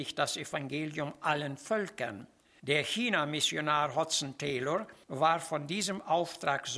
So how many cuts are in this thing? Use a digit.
0